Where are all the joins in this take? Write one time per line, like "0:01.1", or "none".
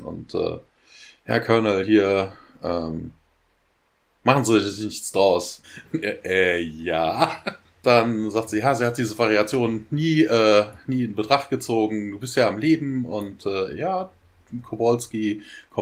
0:05.6